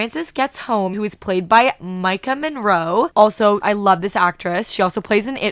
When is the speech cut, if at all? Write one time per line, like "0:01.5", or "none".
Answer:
0:00.9
0:03.6

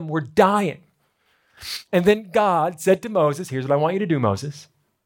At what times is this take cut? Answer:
none

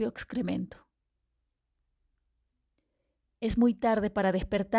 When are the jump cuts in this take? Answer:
none

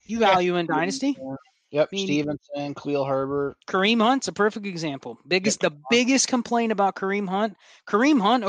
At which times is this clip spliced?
0:03.6

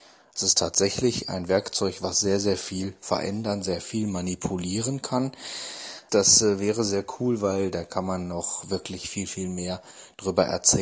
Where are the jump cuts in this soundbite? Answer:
0:06.1

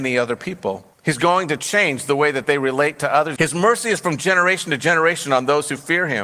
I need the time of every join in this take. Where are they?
0:00.9
0:03.4

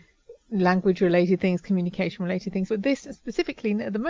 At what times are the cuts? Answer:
none

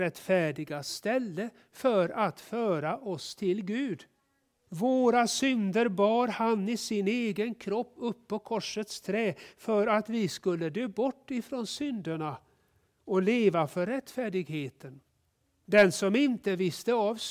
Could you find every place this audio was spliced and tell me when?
0:04.7
0:15.6

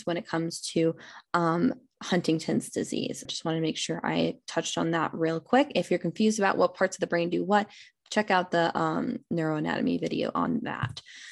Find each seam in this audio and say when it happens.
0:03.3

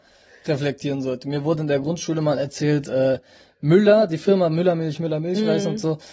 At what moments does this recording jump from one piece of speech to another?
none

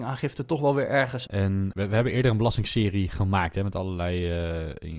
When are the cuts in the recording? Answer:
0:01.3

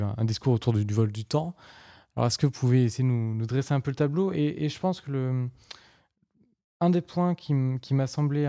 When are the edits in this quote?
none

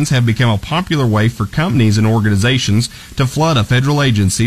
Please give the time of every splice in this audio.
none

